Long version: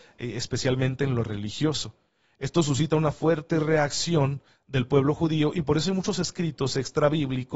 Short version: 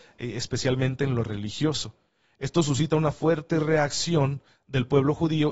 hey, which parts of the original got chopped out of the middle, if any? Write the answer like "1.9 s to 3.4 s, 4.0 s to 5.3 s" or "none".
none